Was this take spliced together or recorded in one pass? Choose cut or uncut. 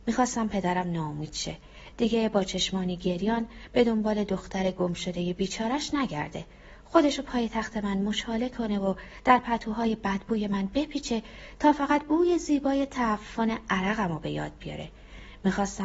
uncut